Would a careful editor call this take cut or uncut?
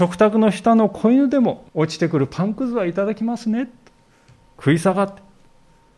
cut